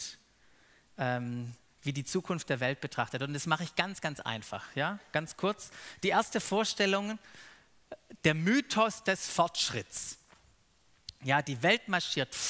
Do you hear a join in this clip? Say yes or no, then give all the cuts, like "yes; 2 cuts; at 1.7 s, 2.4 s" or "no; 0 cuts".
no; 0 cuts